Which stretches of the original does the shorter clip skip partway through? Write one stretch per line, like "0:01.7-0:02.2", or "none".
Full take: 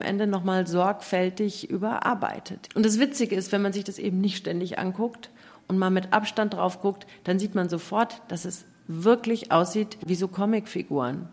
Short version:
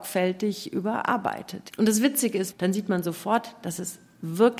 0:03.5-0:07.2